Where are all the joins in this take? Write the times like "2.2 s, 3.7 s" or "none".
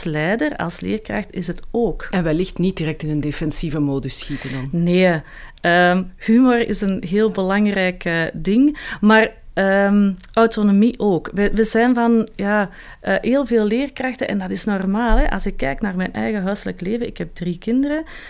none